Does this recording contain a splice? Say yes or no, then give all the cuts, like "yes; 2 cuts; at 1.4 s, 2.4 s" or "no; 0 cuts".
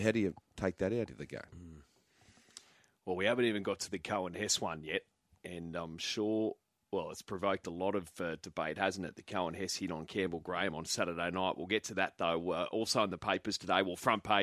no; 0 cuts